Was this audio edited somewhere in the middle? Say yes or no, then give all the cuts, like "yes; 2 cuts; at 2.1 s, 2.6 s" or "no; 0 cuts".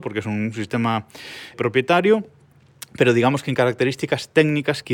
yes; 1 cut; at 1.5 s